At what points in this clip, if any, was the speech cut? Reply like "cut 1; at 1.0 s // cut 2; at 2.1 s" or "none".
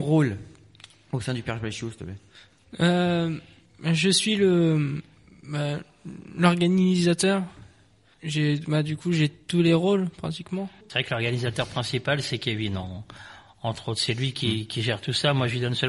cut 1; at 10.8 s